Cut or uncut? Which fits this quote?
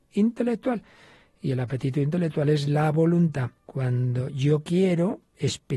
cut